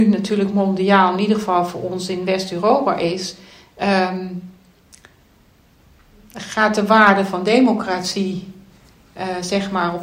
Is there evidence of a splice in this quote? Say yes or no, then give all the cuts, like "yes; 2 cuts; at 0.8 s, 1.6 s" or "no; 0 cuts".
no; 0 cuts